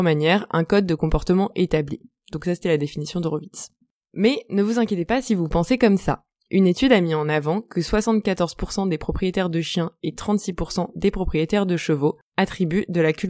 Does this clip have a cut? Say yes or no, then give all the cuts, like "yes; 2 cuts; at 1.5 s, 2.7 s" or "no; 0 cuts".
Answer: no; 0 cuts